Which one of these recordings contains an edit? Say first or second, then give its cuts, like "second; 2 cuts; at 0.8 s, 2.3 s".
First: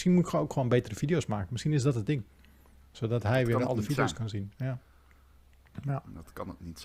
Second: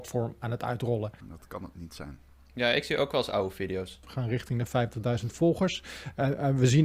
second; 2 cuts; at 1.2 s, 4.0 s